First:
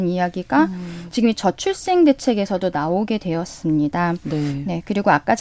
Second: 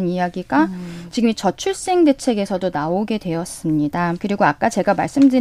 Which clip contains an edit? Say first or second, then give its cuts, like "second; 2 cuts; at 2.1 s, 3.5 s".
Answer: second; 1 cut; at 4.2 s